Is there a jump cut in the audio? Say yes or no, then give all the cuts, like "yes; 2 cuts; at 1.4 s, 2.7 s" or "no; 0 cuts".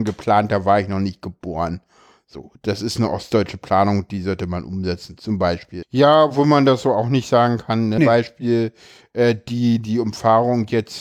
yes; 2 cuts; at 5.8 s, 8.0 s